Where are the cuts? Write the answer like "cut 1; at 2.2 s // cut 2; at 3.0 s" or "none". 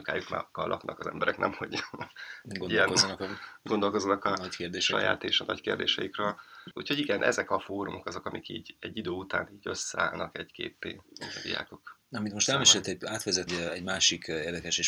cut 1; at 13.5 s